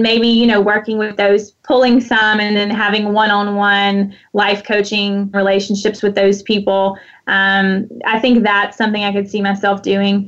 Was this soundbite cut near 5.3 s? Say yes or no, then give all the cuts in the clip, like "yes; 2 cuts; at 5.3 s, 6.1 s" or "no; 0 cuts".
yes; 2 cuts; at 1.6 s, 5.3 s